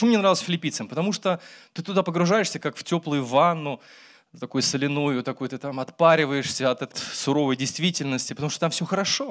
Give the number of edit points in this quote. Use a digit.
1